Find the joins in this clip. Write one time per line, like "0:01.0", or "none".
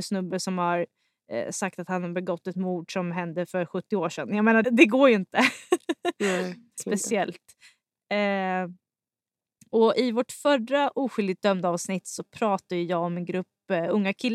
0:04.6
0:06.8